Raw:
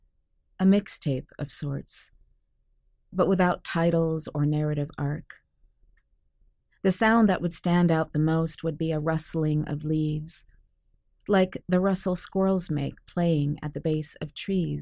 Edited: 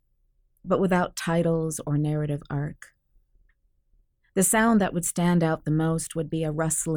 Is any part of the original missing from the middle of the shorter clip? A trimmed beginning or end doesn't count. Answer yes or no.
no